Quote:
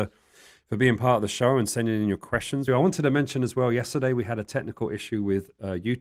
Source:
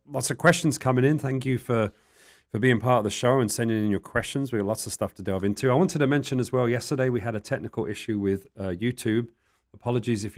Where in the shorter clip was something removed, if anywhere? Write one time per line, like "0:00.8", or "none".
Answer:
0:02.7